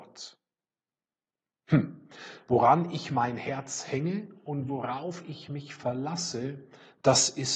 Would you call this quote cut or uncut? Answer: uncut